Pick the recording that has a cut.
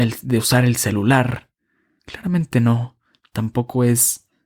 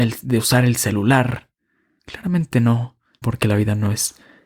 second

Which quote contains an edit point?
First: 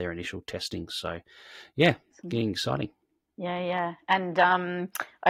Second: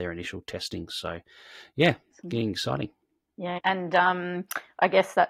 second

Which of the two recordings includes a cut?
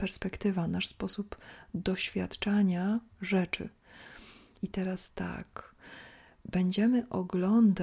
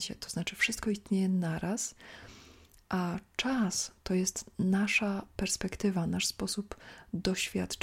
first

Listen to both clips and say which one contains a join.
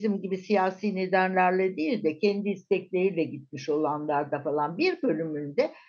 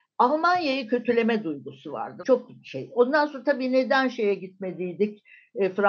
second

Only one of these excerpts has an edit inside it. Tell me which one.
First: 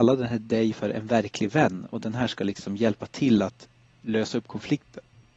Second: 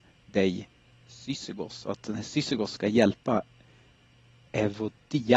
second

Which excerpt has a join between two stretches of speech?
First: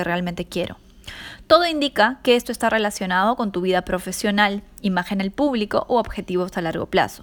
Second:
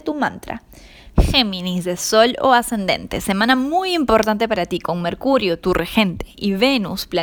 second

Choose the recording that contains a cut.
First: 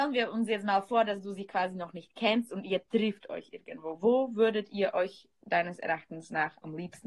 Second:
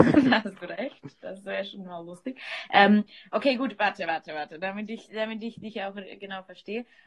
first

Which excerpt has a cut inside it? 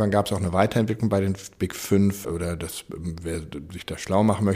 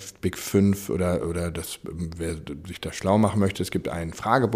first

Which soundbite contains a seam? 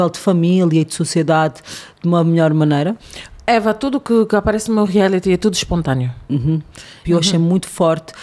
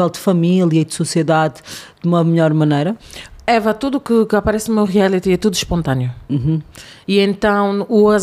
first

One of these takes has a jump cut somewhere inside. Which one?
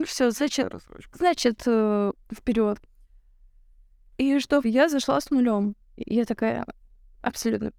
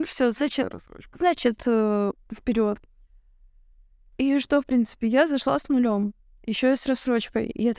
first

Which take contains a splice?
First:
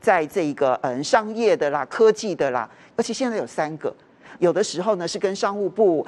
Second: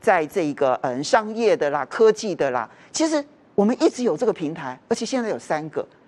first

